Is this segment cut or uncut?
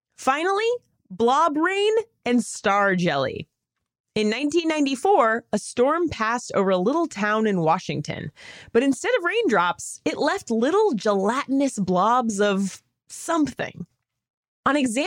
uncut